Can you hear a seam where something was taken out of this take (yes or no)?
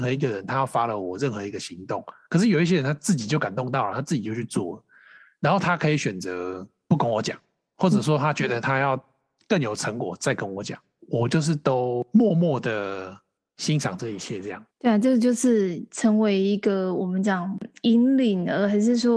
yes